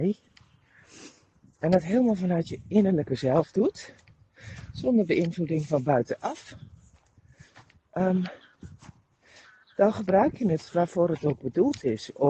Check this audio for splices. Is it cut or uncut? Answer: uncut